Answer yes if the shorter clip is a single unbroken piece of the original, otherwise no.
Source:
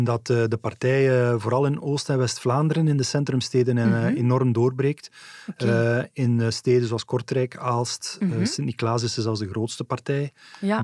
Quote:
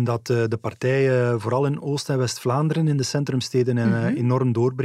yes